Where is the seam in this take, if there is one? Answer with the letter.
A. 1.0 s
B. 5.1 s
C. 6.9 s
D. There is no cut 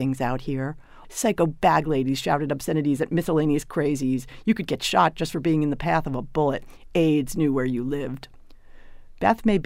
A